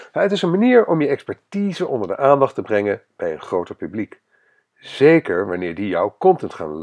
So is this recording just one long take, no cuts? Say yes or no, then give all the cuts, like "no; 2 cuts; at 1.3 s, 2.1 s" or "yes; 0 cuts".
yes; 0 cuts